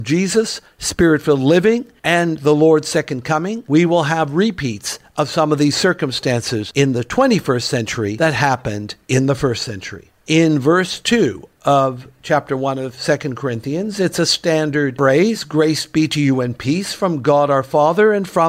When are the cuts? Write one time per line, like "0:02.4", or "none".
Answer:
none